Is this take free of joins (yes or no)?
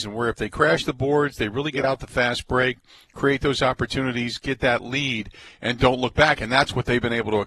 yes